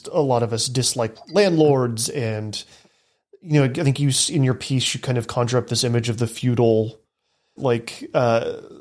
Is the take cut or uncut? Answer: cut